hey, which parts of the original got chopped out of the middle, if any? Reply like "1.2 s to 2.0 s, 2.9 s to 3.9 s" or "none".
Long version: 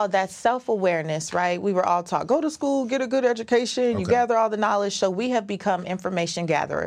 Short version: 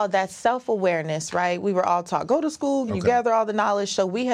2.9 s to 3.9 s